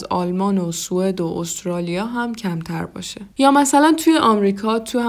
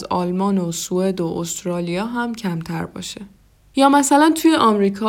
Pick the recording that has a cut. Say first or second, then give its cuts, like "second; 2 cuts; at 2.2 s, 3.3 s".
first; 1 cut; at 3.3 s